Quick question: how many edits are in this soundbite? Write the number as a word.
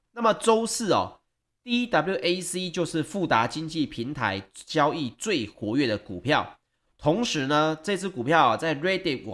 zero